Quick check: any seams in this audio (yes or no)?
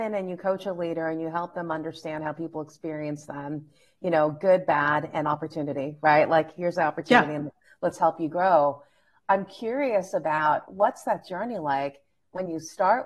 no